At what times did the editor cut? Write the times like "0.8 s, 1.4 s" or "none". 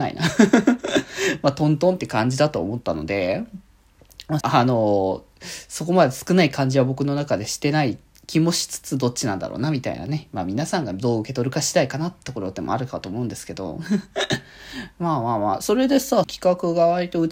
4.4 s, 16.2 s